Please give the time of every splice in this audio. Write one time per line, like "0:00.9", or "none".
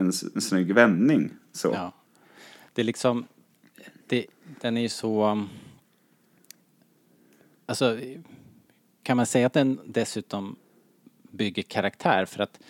none